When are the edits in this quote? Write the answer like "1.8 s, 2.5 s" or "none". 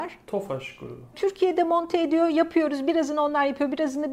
1.1 s